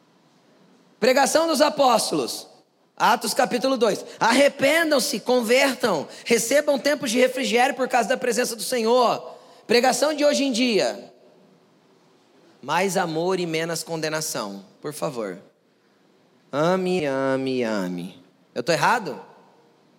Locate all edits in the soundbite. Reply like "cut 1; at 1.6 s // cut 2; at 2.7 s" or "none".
cut 1; at 17.0 s